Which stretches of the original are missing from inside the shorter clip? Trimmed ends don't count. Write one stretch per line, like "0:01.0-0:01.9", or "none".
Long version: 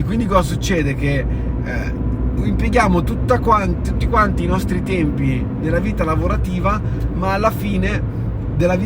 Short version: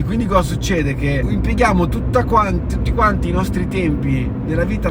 0:01.2-0:02.4